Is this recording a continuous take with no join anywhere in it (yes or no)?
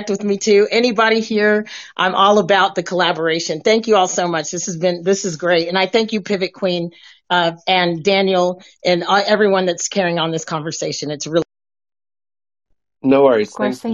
yes